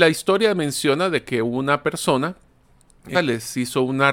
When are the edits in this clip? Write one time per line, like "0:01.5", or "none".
0:03.1